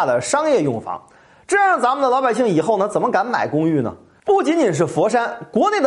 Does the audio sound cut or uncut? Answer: uncut